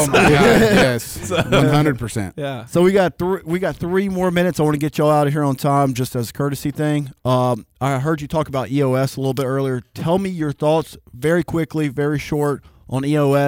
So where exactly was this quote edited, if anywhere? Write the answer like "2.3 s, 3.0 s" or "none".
none